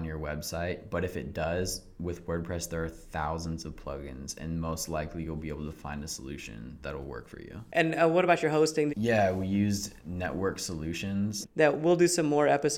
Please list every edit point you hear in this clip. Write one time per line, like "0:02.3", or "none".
0:08.9
0:11.4